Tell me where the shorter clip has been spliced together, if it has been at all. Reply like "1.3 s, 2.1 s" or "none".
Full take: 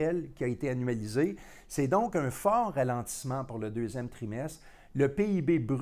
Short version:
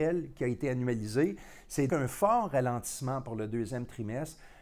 1.9 s